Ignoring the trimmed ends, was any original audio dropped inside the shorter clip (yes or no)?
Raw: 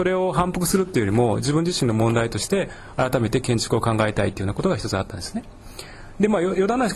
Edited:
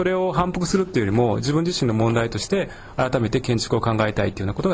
no